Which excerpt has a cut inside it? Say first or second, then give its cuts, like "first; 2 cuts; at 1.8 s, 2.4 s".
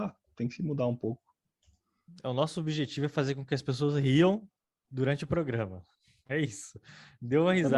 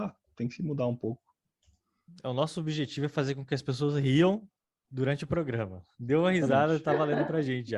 second; 1 cut; at 5.9 s